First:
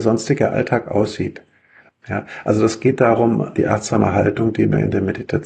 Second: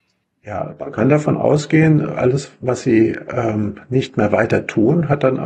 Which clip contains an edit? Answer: first; 2 cuts; at 1.9 s, 3.6 s

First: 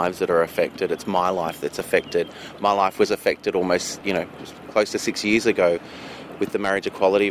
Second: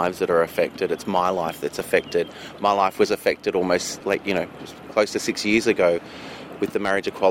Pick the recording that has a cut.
first; 1 cut; at 4.0 s

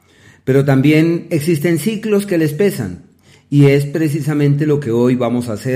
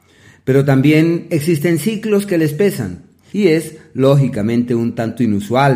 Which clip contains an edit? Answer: second; 1 cut; at 3.3 s

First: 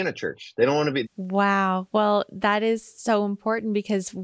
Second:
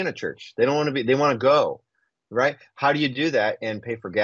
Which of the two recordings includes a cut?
first; 1 cut; at 1.0 s

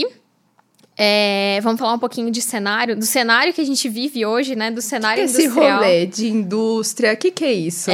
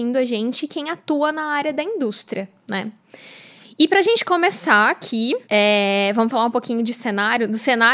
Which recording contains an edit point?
second; 1 cut; at 5.4 s

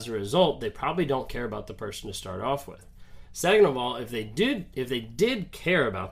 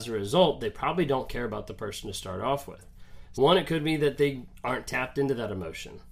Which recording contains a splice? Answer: second; 1 cut; at 3.3 s

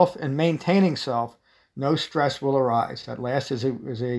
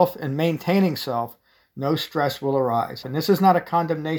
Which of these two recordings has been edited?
second; 1 cut; at 3.0 s

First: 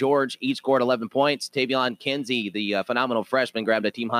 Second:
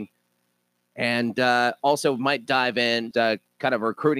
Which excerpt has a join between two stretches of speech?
second; 1 cut; at 3.1 s

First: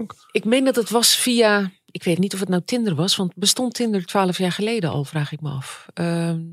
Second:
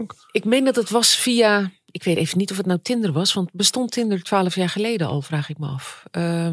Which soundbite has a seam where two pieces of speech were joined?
first; 1 cut; at 2.2 s

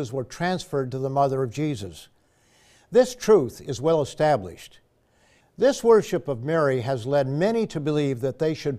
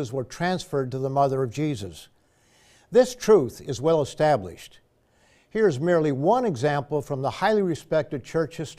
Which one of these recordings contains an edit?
first; 1 cut; at 5.4 s

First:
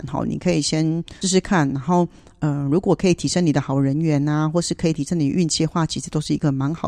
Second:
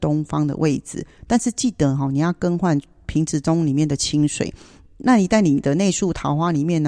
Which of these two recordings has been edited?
first; 1 cut; at 1.2 s

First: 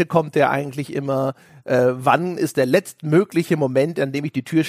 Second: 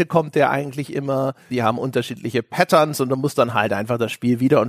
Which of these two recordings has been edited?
second; 1 cut; at 1.5 s

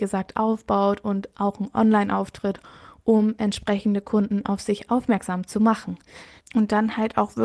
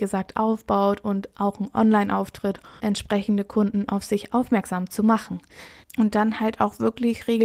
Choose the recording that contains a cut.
second; 1 cut; at 2.8 s

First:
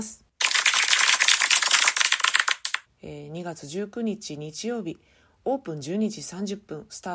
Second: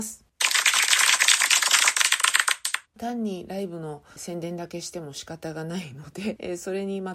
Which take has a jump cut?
first; 1 cut; at 2.9 s

